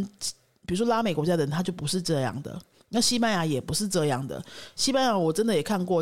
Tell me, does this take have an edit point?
no; 0 cuts

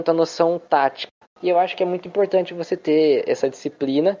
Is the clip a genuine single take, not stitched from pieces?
no; 1 cut; at 1.2 s

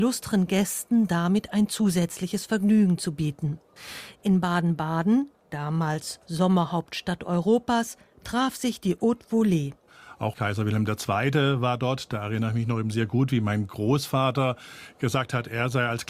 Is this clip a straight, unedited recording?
yes; 0 cuts

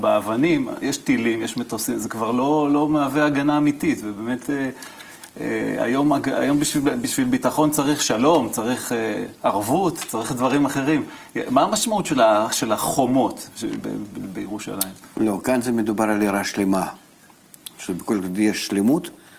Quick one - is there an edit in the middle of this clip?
no; 0 cuts

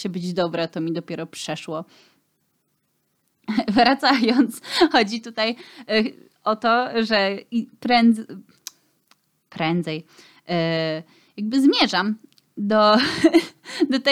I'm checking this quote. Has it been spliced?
no; 0 cuts

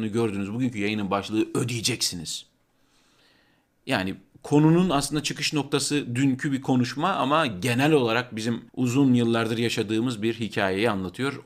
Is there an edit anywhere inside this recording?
yes; 1 cut; at 8.7 s

